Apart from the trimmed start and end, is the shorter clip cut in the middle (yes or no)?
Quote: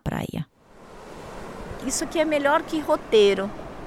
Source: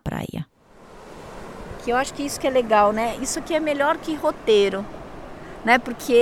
yes